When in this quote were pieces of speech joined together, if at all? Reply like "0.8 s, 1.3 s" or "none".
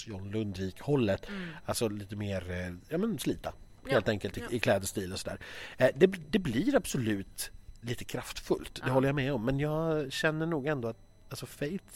5.8 s